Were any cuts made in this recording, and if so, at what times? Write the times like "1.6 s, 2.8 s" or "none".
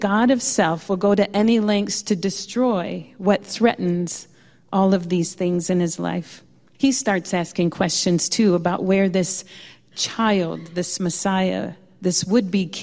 6.7 s